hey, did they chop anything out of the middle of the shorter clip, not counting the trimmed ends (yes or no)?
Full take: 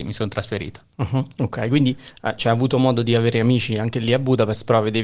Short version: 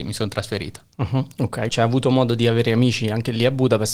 yes